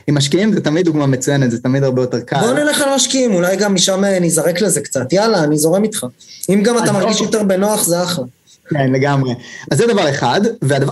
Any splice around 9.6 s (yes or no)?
yes